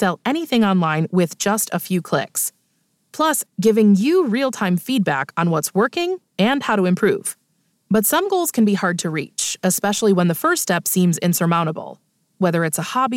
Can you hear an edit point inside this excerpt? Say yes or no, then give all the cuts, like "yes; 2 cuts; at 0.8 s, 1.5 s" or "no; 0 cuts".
yes; 2 cuts; at 3.5 s, 7.7 s